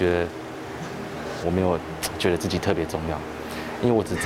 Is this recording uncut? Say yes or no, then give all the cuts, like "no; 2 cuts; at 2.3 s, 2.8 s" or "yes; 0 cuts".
no; 1 cut; at 1.4 s